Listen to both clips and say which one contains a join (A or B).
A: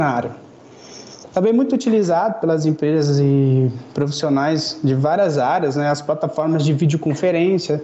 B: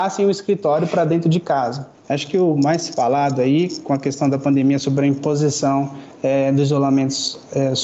B